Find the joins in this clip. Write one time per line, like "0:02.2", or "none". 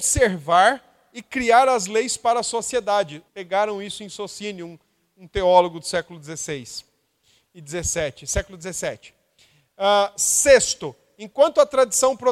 0:03.3

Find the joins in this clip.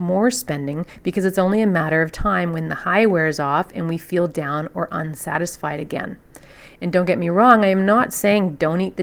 none

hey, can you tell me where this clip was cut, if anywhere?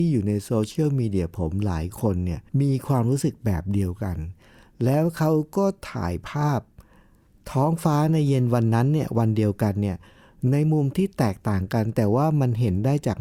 0:02.5

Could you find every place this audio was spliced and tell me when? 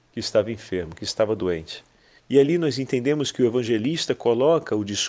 0:02.2

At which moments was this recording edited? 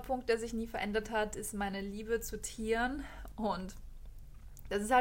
0:03.3

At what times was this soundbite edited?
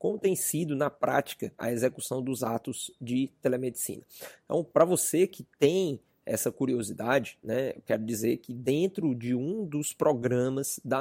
0:01.6

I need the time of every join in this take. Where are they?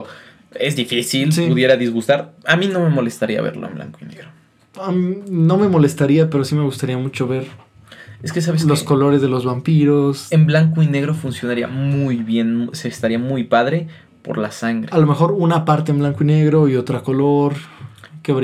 none

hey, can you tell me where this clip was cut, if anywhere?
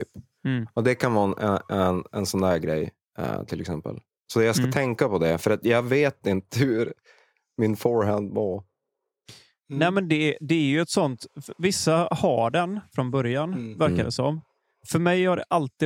none

